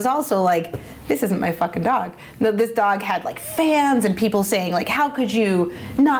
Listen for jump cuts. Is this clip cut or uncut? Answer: uncut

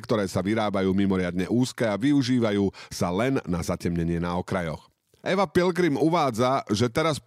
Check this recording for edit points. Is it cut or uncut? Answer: cut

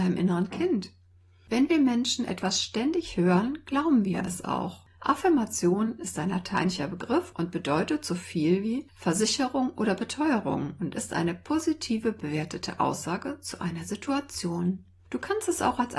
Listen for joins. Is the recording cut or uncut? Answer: cut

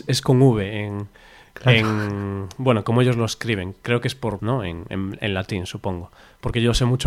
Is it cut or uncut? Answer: cut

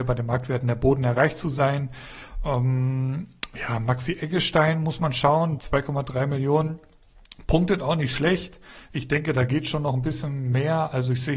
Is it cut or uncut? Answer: cut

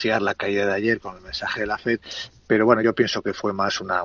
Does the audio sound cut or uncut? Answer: uncut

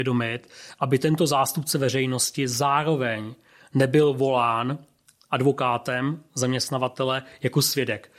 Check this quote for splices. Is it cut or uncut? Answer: uncut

